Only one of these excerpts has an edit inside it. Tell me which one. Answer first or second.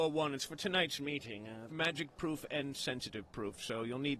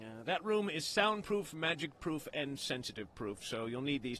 first